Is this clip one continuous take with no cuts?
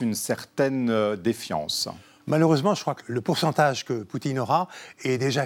no; 1 cut; at 3.0 s

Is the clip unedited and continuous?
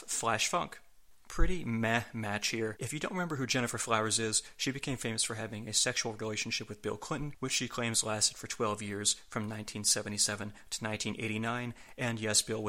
no; 1 cut; at 2.8 s

